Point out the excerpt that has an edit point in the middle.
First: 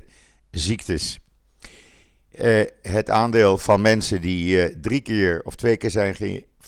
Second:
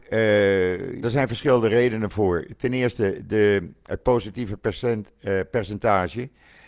second; 1 cut; at 1.0 s

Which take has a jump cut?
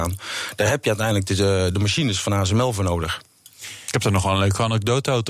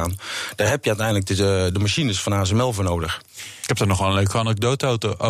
second; 1 cut; at 3.3 s

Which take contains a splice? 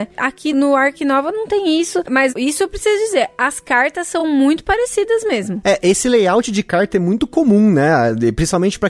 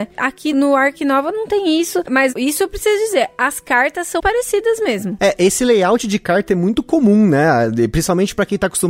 second; 1 cut; at 4.2 s

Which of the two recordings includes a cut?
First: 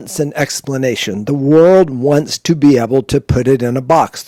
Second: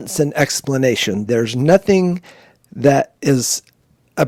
second; 1 cut; at 1.3 s

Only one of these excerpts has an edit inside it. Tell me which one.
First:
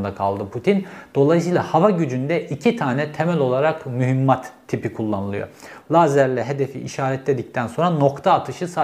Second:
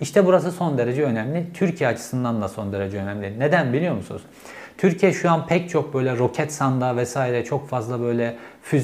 first; 1 cut; at 5.8 s

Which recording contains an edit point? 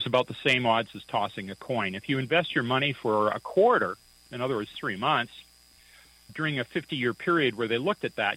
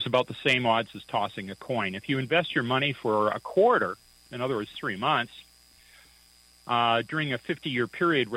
first; 1 cut; at 6.3 s

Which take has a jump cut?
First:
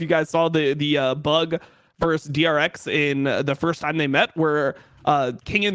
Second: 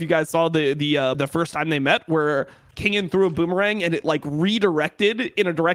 second; 2 cuts; at 1.1 s, 2.7 s

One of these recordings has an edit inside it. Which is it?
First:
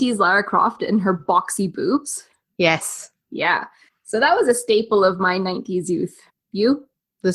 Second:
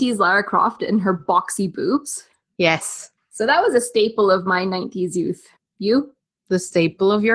second; 1 cut; at 3.2 s

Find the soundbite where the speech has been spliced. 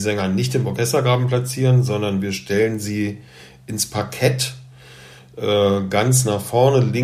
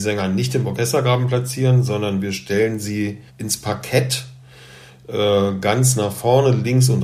second; 1 cut; at 3.3 s

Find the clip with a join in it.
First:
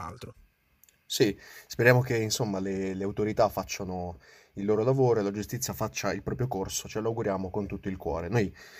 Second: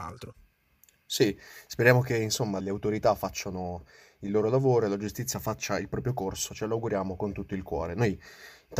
second; 1 cut; at 2.6 s

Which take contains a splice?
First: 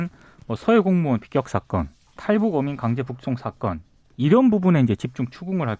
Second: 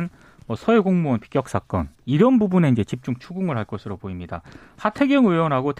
second; 1 cut; at 1.9 s

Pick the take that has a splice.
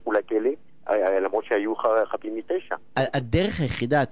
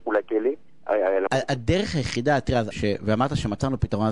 second; 2 cuts; at 1.3 s, 2.7 s

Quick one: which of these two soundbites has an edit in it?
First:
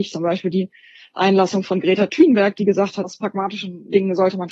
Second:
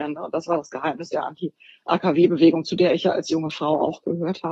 first; 1 cut; at 3.0 s

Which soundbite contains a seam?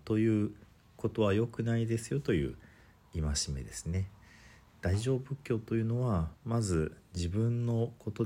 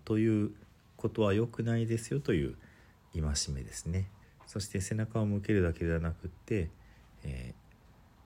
second; 1 cut; at 4.2 s

